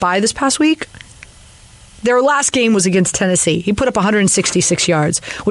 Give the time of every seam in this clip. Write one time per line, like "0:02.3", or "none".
none